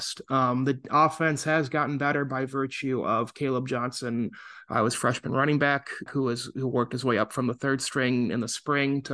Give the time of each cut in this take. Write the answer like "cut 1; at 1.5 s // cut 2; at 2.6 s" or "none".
cut 1; at 6.1 s